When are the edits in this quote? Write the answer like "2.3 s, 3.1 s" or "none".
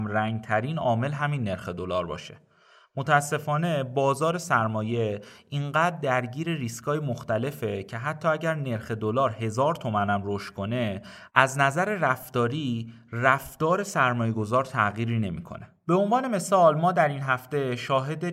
none